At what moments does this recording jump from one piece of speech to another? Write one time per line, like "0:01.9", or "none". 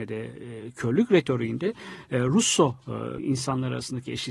0:03.2